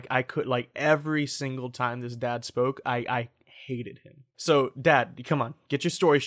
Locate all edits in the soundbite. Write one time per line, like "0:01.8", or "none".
0:04.3